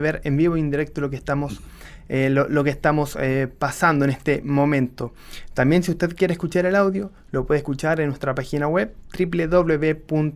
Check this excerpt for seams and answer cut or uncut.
uncut